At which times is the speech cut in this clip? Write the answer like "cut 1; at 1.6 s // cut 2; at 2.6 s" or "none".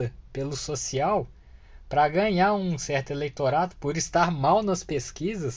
cut 1; at 3.8 s